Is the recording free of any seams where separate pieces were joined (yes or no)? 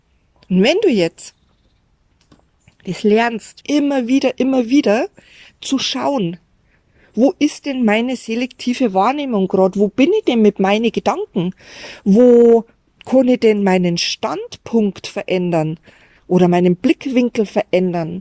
no